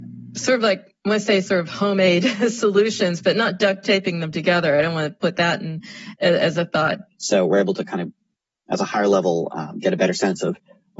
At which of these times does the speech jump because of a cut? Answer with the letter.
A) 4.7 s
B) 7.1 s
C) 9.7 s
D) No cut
B